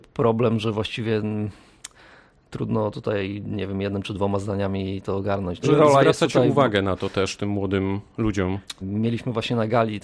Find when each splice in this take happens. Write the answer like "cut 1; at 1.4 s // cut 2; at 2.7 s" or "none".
cut 1; at 5.6 s // cut 2; at 8.8 s